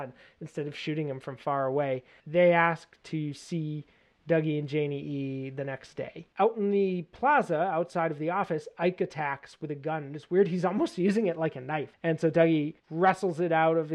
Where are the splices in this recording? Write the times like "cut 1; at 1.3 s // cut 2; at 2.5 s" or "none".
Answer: cut 1; at 2.2 s // cut 2; at 11.9 s